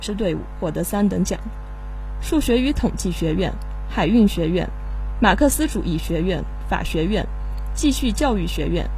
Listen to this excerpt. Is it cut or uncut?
uncut